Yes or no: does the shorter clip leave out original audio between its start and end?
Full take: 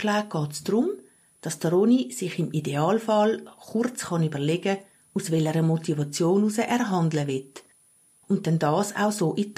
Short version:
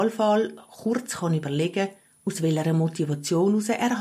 no